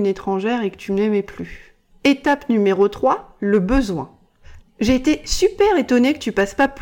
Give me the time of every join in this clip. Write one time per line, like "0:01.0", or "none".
0:04.6